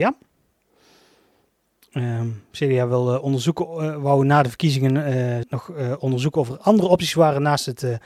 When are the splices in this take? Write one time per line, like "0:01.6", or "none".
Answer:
0:05.4